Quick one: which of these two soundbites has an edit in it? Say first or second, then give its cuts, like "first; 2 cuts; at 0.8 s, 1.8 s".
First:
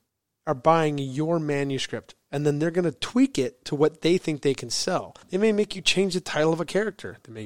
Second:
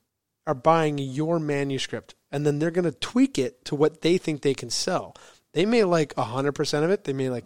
first; 1 cut; at 5.2 s